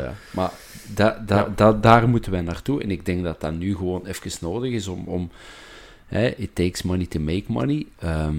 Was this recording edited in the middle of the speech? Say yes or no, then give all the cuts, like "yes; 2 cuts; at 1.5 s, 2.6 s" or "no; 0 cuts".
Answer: no; 0 cuts